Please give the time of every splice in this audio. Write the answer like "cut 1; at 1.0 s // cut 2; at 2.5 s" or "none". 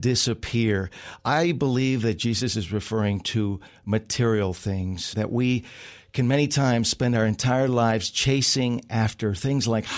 cut 1; at 5.1 s